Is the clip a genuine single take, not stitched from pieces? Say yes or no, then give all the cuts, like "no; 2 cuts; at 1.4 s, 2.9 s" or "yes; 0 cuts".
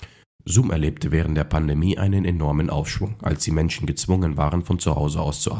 yes; 0 cuts